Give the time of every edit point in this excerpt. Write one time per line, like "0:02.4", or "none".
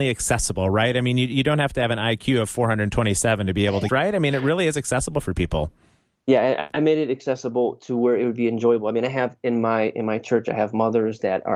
0:03.9